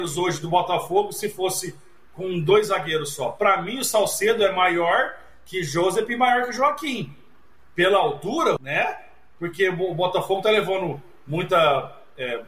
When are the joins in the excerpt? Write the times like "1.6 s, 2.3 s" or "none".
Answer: 8.6 s